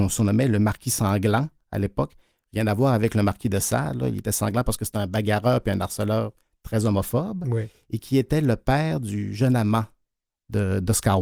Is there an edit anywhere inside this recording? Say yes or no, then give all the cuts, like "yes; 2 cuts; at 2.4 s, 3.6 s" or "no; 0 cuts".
no; 0 cuts